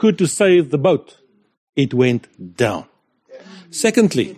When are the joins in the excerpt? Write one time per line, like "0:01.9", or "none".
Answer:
none